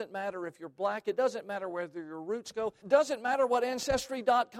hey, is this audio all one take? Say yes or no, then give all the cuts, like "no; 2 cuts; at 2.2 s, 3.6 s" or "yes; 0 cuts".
no; 1 cut; at 2.8 s